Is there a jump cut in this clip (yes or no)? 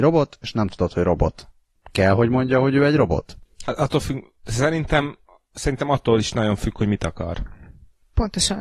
no